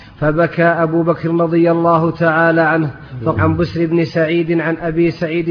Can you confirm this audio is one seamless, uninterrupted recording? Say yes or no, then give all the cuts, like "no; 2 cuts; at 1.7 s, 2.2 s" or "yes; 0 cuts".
no; 1 cut; at 3.3 s